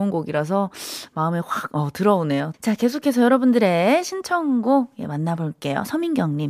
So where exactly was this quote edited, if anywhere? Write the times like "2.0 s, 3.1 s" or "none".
2.5 s